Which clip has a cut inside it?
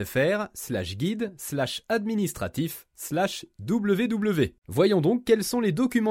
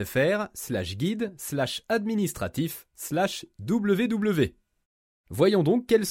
first; 1 cut; at 4.6 s

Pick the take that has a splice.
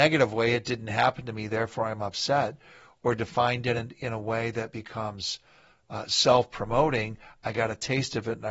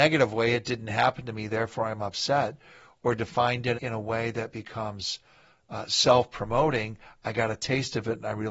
second; 1 cut; at 3.7 s

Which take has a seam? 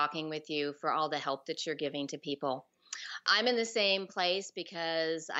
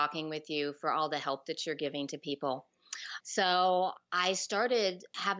second; 1 cut; at 3.2 s

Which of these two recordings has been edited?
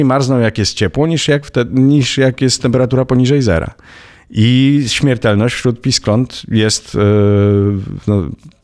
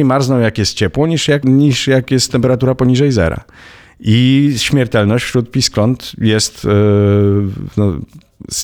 second; 1 cut; at 1.4 s

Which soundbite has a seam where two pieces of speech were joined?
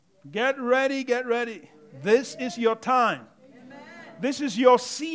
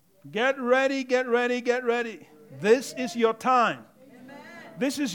first; 1 cut; at 1.1 s

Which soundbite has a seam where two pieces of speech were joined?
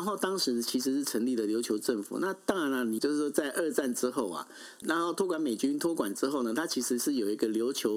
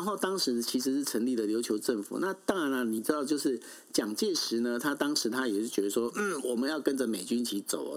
first; 2 cuts; at 3.0 s, 4.8 s

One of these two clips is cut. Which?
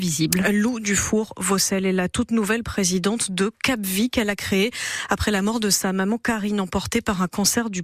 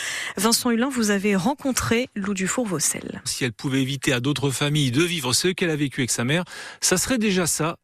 second; 1 cut; at 3.3 s

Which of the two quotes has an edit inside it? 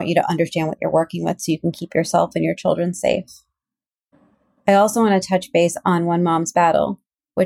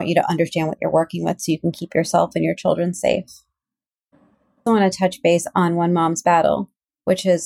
second; 1 cut; at 4.7 s

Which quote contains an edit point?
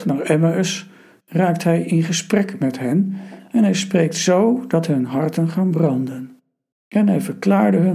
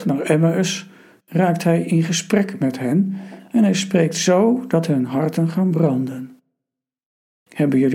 first; 1 cut; at 6.7 s

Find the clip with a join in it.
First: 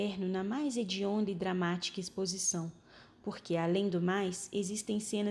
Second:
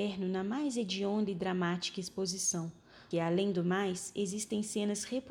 second; 1 cut; at 3.1 s

